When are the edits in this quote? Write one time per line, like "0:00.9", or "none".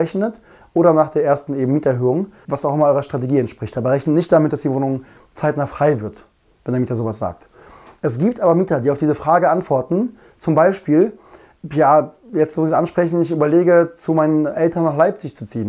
0:02.4

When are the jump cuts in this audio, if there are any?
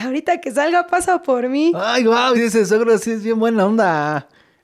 0:02.3

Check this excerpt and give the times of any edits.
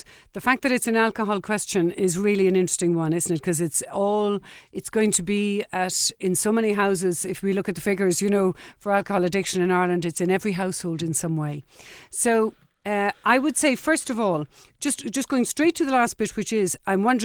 none

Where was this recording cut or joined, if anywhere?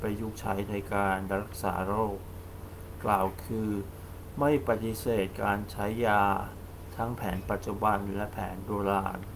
none

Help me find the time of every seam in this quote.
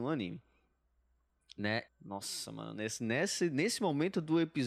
0:01.9

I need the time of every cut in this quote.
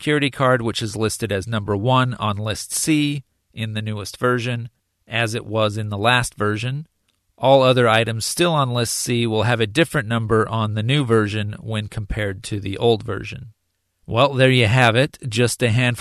none

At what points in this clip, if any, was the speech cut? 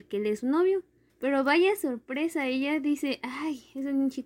0:01.1

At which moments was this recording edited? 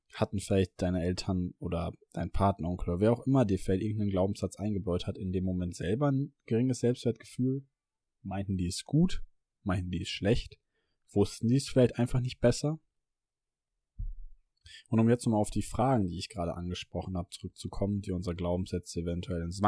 none

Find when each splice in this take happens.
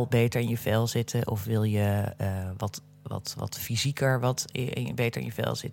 none

